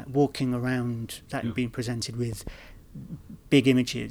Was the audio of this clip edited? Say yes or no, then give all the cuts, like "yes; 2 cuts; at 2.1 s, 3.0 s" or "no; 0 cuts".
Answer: yes; 1 cut; at 1.4 s